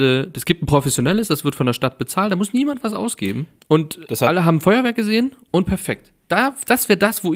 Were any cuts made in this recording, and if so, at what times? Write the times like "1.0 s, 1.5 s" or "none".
3.6 s